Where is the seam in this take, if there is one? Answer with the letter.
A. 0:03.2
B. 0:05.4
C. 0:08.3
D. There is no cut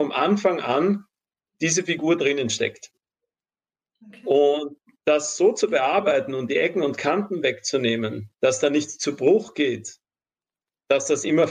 C